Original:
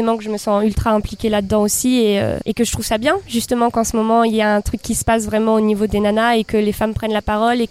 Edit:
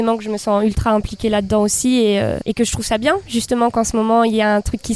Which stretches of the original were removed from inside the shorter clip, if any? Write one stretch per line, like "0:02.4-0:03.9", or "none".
none